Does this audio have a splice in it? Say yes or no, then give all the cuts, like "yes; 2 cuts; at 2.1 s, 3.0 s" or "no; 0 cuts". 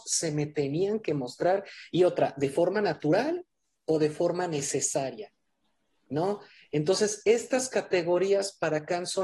no; 0 cuts